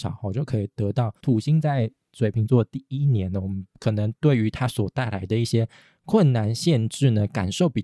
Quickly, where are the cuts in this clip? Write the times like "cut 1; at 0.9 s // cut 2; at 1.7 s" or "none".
cut 1; at 1.2 s

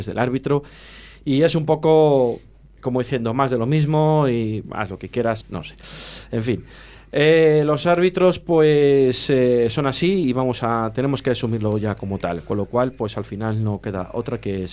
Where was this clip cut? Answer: cut 1; at 5.4 s

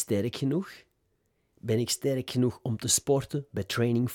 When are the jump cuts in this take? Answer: none

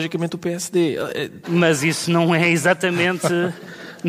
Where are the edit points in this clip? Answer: cut 1; at 1.4 s

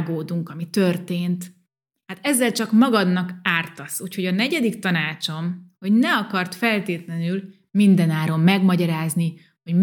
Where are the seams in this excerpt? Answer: none

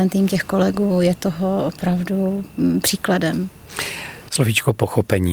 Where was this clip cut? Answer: none

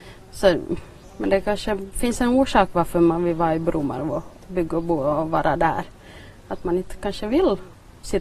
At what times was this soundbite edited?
none

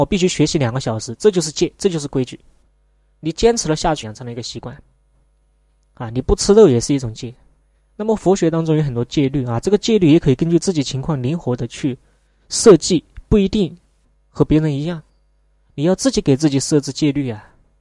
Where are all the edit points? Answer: cut 1; at 4.0 s

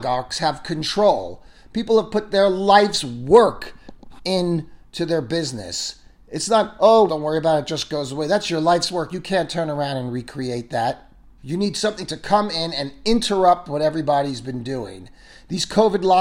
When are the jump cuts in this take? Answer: cut 1; at 7.1 s // cut 2; at 11.4 s

